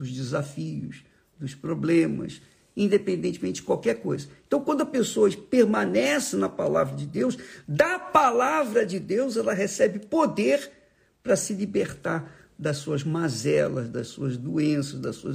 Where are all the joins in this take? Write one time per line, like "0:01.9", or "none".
none